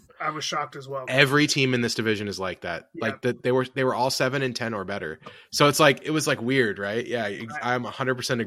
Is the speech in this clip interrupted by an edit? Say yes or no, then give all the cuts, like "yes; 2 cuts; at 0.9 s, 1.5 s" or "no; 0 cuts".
no; 0 cuts